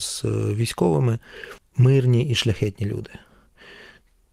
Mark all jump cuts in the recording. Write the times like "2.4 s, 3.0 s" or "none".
1.6 s